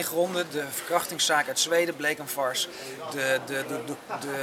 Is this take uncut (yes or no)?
yes